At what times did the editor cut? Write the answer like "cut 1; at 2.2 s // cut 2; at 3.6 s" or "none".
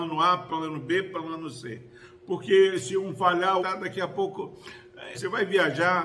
cut 1; at 3.6 s // cut 2; at 5.1 s

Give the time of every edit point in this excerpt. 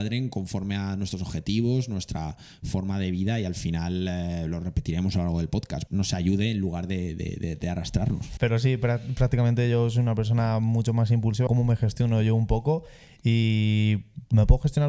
cut 1; at 5.9 s // cut 2; at 8.4 s // cut 3; at 11.5 s

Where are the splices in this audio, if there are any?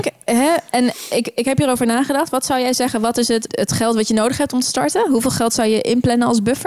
cut 1; at 3.5 s

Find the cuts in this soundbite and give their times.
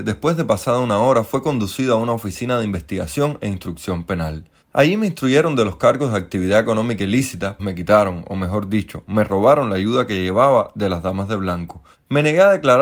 cut 1; at 7.6 s

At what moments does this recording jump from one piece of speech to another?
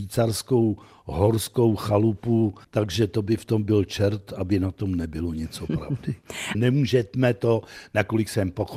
cut 1; at 2.6 s // cut 2; at 6.5 s

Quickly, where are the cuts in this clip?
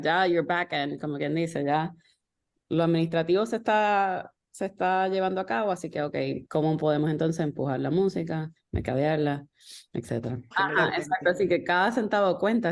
cut 1; at 6.4 s // cut 2; at 10.5 s

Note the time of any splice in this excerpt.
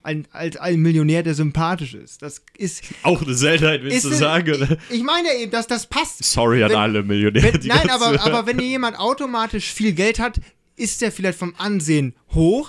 none

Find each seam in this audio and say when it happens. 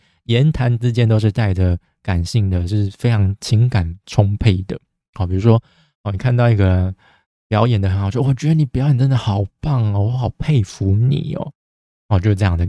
none

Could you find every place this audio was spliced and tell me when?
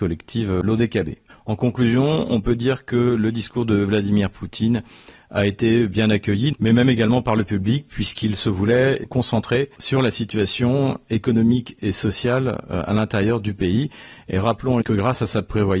cut 1; at 6.5 s // cut 2; at 14.8 s

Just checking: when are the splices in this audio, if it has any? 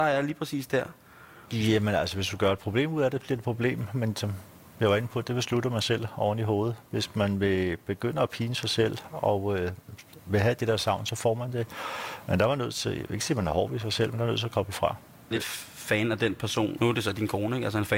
cut 1; at 15.3 s // cut 2; at 16.8 s

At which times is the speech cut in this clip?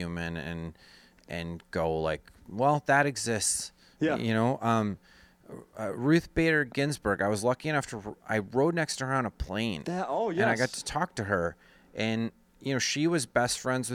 none

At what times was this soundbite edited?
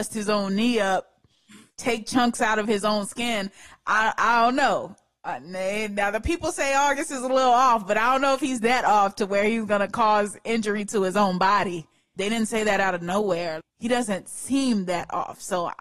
cut 1; at 12.2 s // cut 2; at 13.6 s

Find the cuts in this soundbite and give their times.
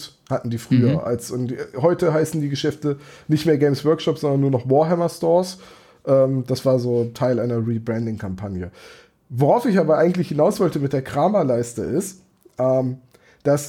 none

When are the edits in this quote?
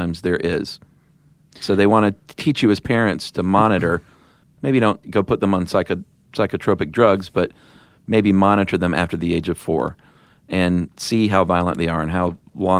cut 1; at 5.0 s

